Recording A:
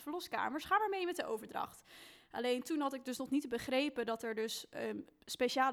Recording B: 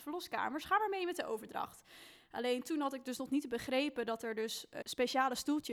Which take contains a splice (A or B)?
B